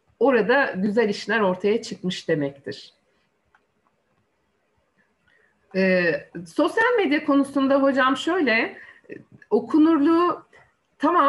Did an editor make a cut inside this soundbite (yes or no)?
no